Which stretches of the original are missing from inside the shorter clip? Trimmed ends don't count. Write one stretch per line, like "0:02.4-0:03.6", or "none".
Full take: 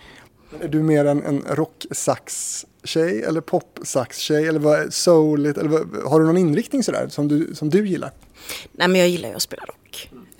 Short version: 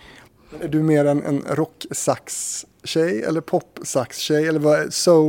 none